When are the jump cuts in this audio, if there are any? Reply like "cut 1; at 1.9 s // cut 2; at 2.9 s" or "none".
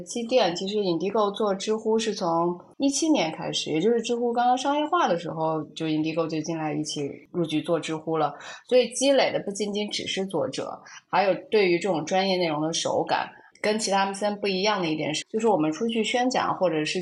cut 1; at 13.5 s // cut 2; at 15.2 s